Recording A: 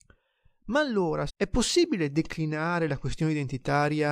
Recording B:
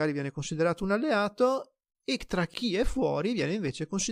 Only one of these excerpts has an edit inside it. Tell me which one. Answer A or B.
A